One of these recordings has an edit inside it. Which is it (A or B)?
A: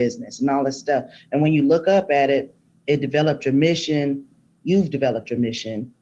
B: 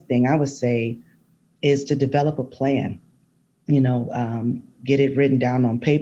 B